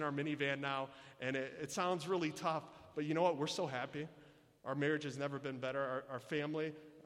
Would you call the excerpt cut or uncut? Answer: uncut